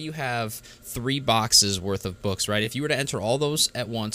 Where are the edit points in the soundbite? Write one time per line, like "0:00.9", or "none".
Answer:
none